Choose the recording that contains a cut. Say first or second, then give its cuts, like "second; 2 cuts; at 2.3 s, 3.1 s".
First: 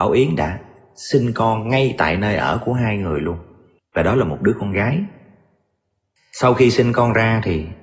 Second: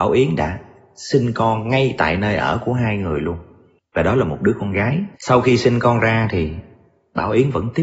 second; 1 cut; at 5.1 s